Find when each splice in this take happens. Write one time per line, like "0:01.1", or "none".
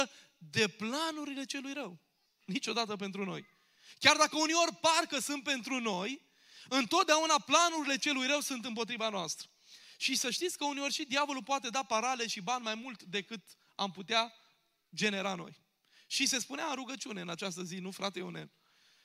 0:02.2